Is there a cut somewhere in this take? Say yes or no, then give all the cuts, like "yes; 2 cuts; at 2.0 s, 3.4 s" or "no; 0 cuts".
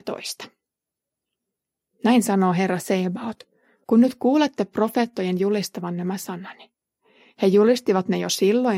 yes; 1 cut; at 3.8 s